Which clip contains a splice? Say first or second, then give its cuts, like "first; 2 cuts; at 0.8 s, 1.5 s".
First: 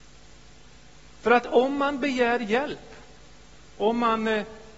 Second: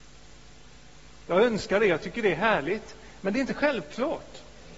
second; 1 cut; at 1.2 s